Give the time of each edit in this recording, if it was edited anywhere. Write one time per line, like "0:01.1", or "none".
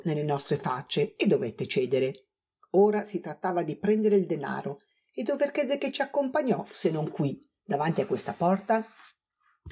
none